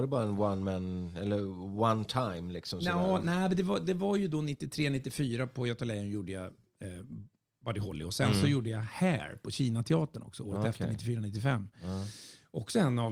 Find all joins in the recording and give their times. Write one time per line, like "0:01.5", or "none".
none